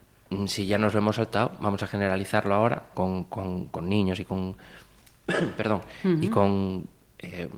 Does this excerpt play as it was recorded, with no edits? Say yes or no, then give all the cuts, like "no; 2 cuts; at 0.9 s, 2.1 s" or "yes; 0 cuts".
no; 1 cut; at 2.9 s